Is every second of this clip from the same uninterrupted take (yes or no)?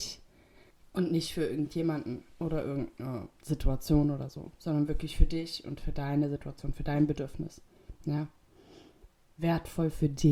yes